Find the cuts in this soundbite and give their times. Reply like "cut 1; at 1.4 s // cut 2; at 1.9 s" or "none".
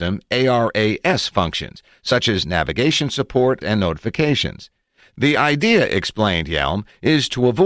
cut 1; at 3.6 s